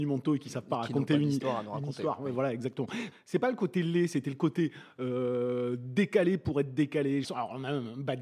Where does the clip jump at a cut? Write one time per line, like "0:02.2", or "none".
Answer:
0:03.1
0:07.2